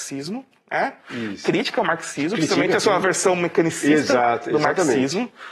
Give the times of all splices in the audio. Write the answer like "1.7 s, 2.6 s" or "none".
none

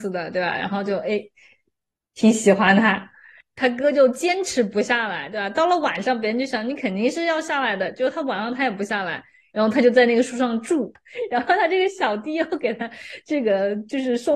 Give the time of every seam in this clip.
none

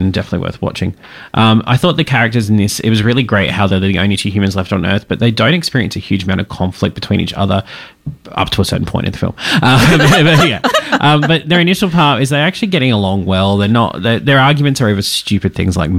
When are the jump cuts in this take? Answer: none

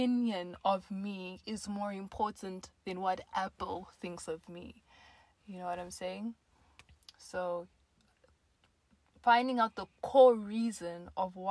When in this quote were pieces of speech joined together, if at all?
none

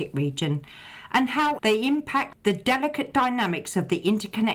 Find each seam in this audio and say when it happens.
1.6 s

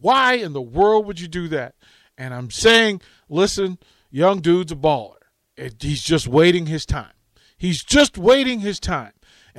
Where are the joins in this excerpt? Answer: none

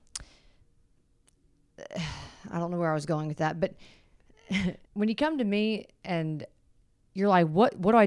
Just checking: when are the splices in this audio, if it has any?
4.9 s

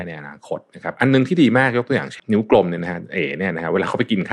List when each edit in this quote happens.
2.2 s

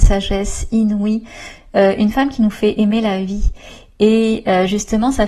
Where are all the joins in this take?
none

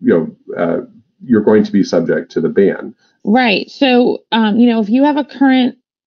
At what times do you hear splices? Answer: 3.2 s

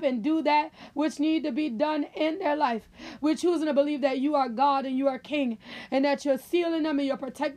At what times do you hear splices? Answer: 3.2 s

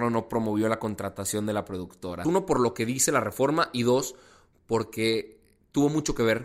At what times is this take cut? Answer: 2.2 s

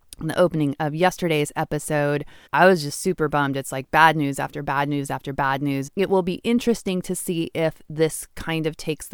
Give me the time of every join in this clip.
2.5 s, 5.9 s

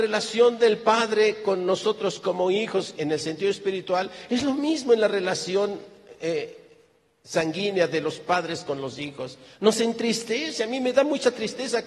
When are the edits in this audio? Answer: 3.0 s

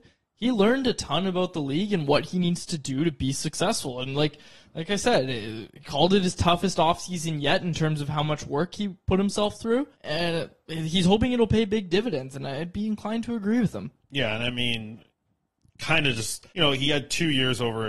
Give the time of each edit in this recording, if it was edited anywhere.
9.9 s, 16.5 s

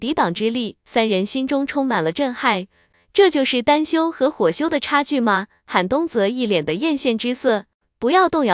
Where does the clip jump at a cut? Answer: none

